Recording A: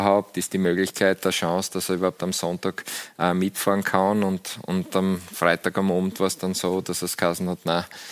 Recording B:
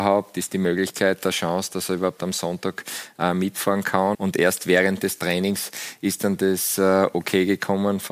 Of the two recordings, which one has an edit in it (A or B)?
B